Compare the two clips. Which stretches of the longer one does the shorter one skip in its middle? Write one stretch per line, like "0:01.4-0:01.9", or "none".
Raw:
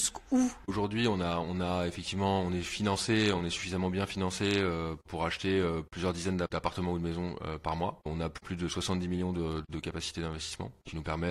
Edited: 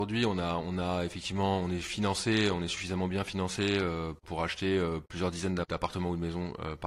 none